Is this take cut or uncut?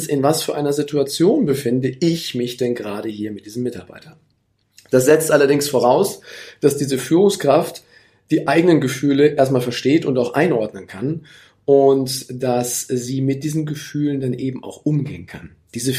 uncut